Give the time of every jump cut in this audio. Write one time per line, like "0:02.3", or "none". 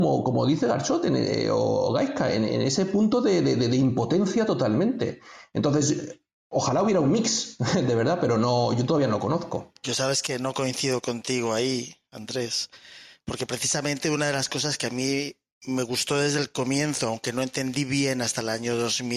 none